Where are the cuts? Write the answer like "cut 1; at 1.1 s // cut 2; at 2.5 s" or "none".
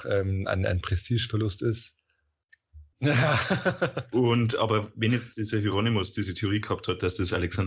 cut 1; at 2.9 s